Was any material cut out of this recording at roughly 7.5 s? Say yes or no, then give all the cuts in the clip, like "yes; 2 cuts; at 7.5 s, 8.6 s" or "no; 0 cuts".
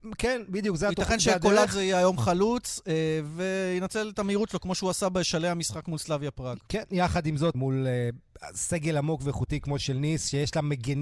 yes; 1 cut; at 7.5 s